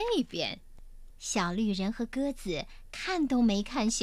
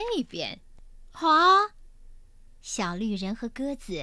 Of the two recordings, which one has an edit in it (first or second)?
first